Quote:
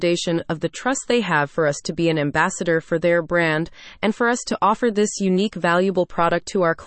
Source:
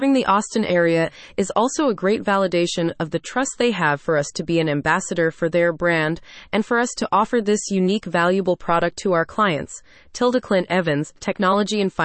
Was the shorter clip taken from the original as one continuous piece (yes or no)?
yes